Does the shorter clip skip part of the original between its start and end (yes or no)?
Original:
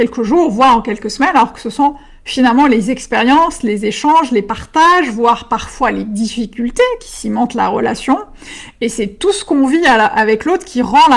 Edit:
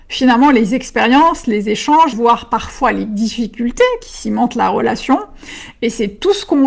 yes